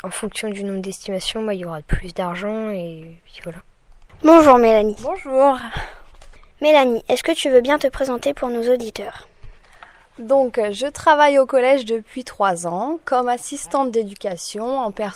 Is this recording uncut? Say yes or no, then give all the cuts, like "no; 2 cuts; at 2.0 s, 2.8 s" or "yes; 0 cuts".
yes; 0 cuts